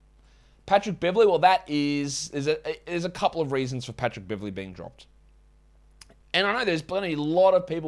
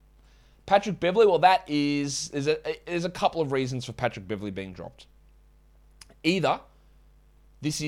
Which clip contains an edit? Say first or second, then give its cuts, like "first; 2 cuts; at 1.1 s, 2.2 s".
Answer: first; 1 cut; at 6.2 s